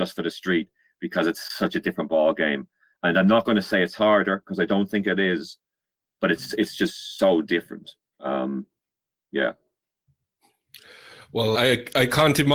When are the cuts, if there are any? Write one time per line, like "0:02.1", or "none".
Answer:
0:06.0
0:11.5

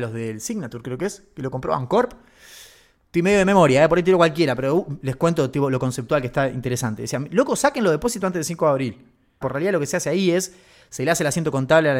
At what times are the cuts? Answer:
0:09.4

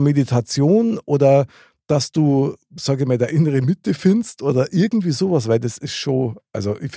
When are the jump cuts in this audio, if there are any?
none

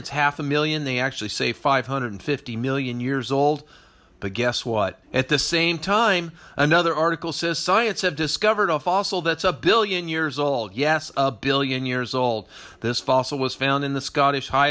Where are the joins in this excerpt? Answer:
0:05.0

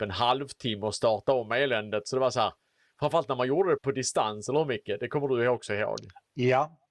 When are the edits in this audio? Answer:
0:03.8

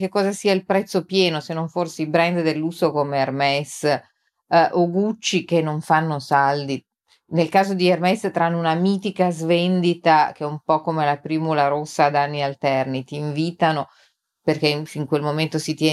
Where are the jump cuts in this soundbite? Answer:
none

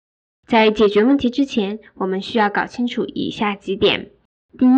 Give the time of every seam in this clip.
none

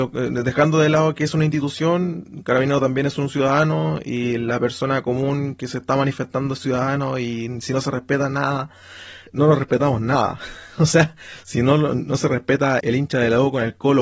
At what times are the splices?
0:09.3
0:12.8

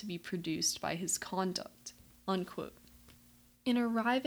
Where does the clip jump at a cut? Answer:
0:02.1

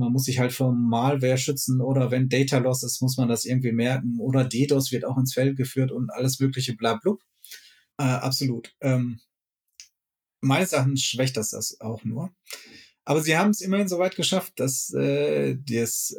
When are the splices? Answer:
0:07.9

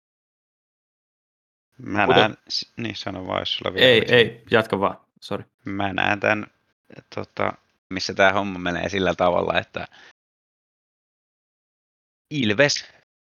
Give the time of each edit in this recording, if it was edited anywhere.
0:02.4
0:05.5
0:07.9

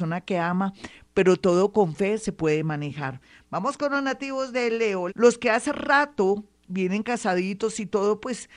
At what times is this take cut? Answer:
0:05.1

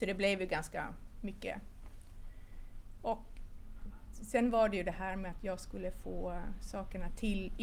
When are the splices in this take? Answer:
0:04.1

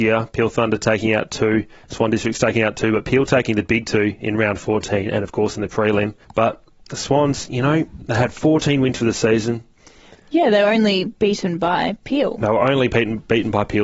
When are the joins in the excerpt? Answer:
0:06.2

